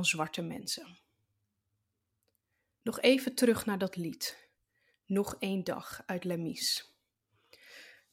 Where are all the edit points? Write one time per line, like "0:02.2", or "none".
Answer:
none